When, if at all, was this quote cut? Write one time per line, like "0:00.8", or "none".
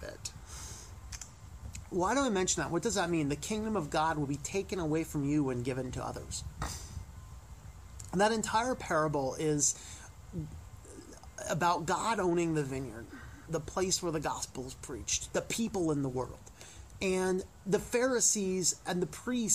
0:13.5
0:15.3